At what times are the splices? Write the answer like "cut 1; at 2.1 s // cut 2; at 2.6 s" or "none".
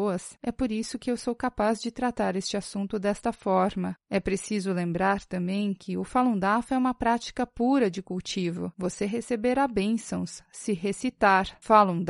none

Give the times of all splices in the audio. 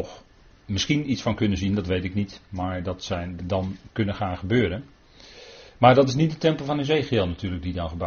cut 1; at 3.4 s

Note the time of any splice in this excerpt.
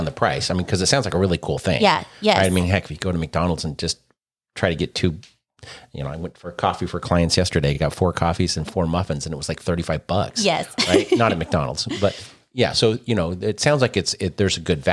none

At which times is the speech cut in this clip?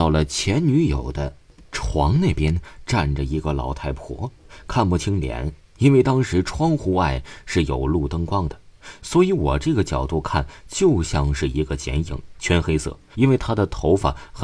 cut 1; at 13.1 s

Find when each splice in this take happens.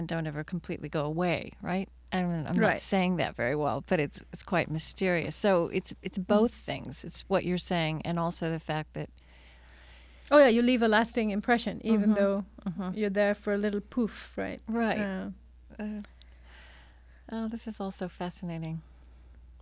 none

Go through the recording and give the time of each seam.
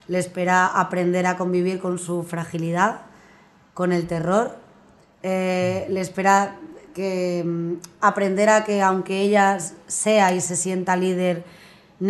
none

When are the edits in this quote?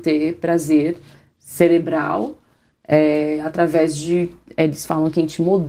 none

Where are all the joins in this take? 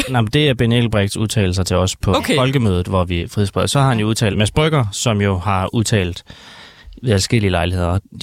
cut 1; at 3.2 s // cut 2; at 4.3 s

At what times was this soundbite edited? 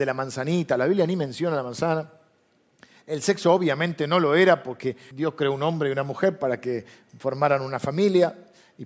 cut 1; at 5.1 s

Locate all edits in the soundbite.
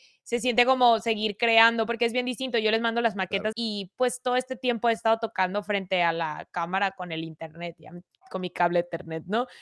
cut 1; at 3.5 s

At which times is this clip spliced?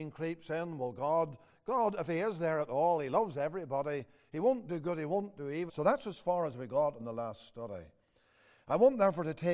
cut 1; at 5.7 s

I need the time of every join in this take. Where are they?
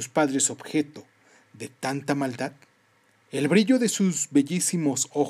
cut 1; at 3.2 s

